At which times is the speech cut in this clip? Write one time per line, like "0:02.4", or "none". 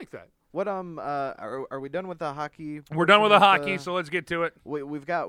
none